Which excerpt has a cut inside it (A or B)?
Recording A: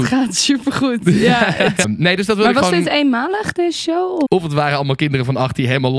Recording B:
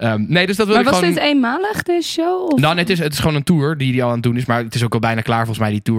A